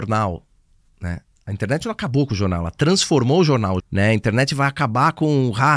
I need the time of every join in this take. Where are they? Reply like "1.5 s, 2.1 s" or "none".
3.8 s